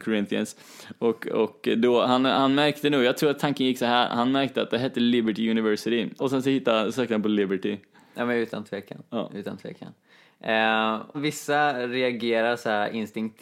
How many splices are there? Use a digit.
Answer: 2